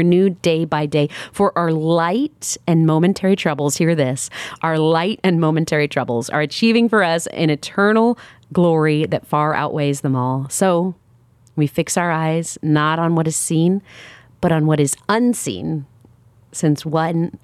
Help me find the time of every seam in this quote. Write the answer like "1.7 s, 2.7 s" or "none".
none